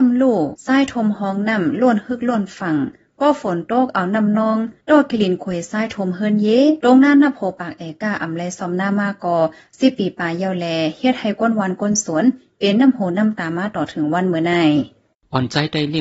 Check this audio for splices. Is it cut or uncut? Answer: uncut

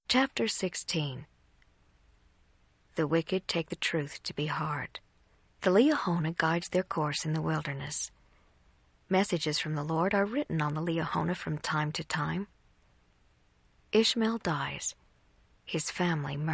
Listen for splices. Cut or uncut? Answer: cut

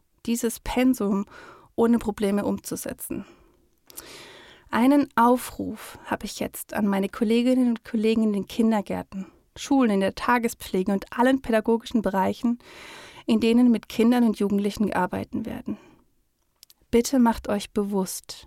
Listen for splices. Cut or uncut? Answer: uncut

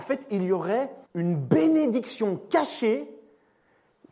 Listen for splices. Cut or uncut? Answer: cut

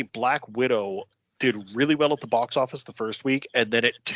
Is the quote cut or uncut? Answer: uncut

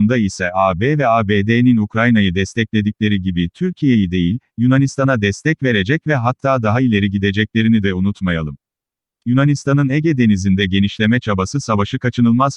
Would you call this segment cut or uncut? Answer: uncut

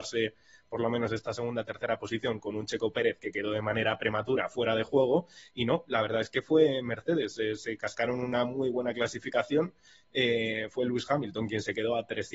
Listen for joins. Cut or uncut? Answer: uncut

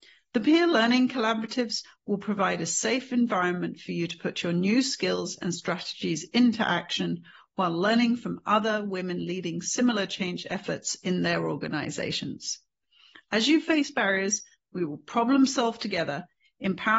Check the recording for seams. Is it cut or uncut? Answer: uncut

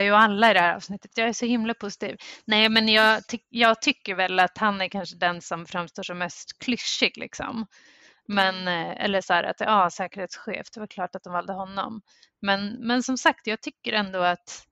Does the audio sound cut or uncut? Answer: uncut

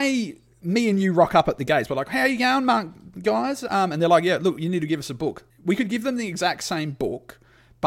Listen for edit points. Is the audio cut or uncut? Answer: uncut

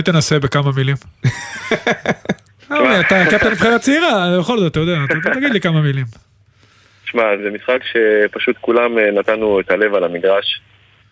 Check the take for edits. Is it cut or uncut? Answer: cut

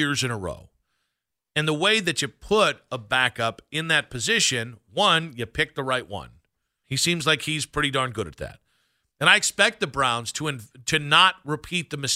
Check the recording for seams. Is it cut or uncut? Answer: cut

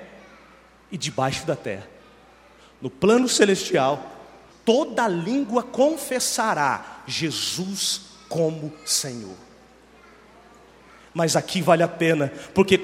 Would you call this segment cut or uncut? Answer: cut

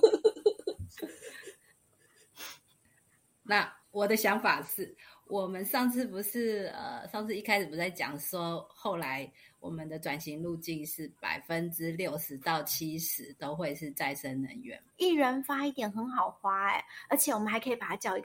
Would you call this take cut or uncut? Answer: cut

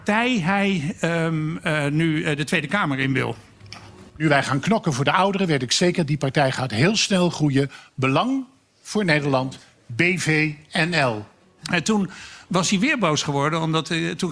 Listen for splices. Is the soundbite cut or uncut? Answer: cut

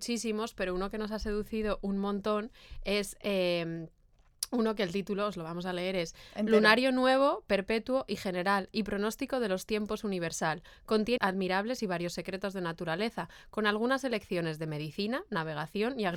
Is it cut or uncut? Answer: cut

